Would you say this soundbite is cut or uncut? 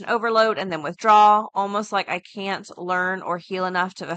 uncut